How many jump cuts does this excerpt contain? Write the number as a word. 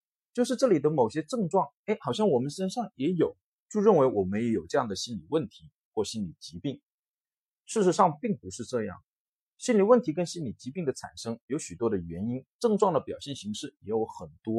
zero